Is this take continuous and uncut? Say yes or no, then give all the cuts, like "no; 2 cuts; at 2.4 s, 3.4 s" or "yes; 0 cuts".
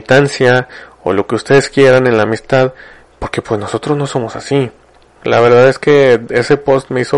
no; 1 cut; at 5.0 s